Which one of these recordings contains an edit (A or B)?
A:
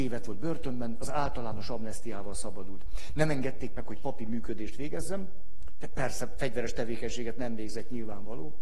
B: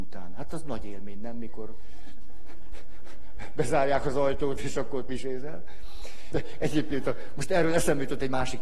B